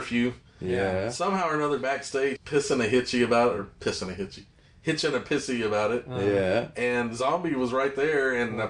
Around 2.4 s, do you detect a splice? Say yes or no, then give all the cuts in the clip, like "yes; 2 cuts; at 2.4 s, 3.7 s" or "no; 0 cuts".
yes; 1 cut; at 2.4 s